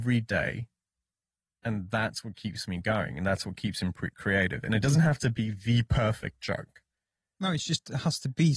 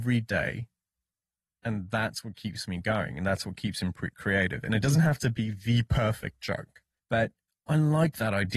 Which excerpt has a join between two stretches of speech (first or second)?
second